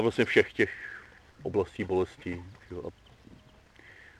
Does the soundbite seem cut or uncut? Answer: uncut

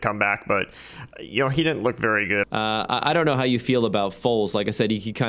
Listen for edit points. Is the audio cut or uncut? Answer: cut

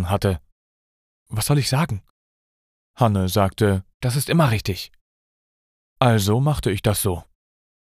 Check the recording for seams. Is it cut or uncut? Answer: cut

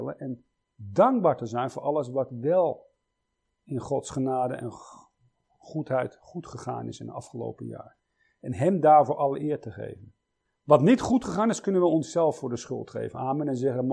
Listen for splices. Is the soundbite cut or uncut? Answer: uncut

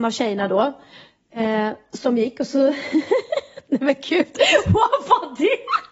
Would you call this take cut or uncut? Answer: uncut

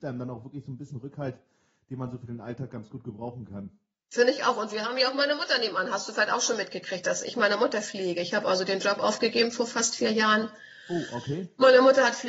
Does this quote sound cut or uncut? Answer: uncut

